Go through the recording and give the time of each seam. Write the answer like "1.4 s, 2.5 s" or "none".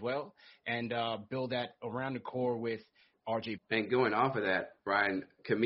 3.6 s